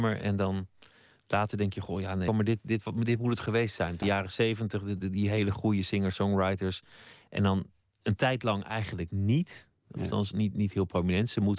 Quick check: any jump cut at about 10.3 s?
no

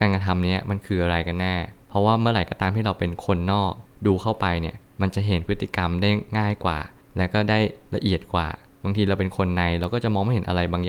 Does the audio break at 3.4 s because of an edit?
no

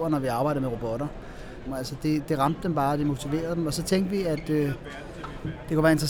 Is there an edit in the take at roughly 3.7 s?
no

